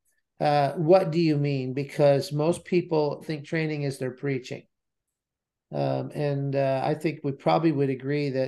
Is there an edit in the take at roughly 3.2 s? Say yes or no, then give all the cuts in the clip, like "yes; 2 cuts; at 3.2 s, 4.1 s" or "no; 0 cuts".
yes; 1 cut; at 3.2 s